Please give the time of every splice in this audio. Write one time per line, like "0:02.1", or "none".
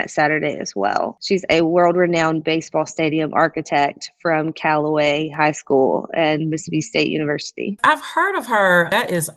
0:01.2